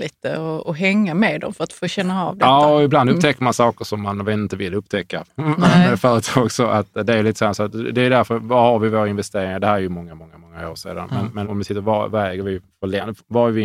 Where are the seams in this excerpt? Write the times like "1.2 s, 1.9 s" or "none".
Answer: 11.4 s